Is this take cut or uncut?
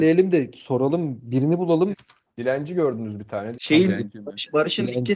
cut